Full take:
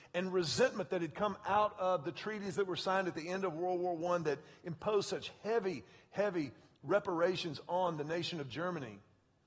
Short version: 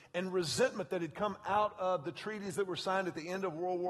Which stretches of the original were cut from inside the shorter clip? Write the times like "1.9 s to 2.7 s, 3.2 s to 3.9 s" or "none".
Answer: none